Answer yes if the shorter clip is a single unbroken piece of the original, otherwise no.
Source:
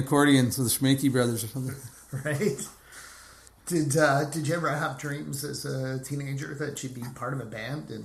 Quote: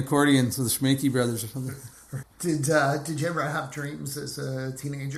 no